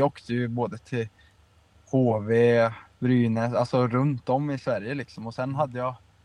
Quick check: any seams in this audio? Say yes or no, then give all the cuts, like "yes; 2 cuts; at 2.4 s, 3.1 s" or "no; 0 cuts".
no; 0 cuts